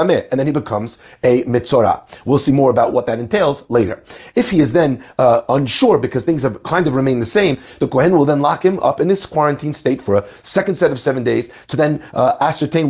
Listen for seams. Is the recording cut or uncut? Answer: uncut